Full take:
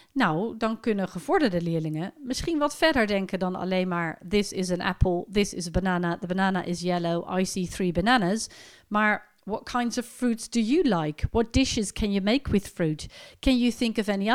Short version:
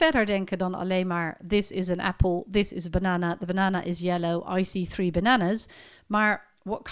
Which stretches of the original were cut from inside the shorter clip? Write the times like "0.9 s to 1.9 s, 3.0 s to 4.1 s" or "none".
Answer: none